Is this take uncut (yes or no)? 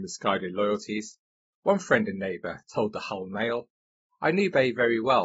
no